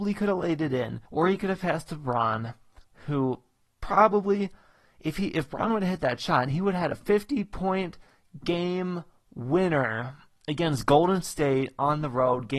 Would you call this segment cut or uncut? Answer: cut